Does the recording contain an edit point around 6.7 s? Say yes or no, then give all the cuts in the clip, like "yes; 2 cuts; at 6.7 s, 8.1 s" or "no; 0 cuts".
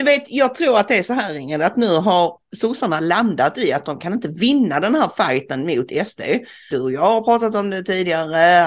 yes; 1 cut; at 6.7 s